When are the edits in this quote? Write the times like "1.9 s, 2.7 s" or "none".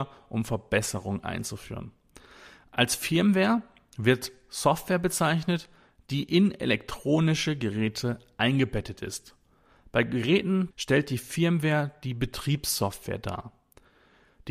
10.7 s